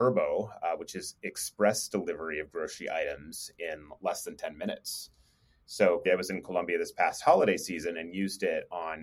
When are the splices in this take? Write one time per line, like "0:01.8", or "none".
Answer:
0:06.1